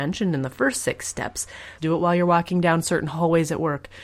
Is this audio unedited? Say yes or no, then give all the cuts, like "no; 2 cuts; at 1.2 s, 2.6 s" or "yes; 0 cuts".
no; 1 cut; at 1.8 s